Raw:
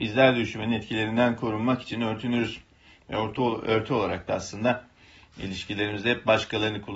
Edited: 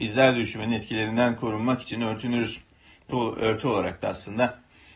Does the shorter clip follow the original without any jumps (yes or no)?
no